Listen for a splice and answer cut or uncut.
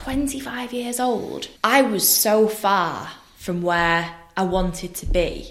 cut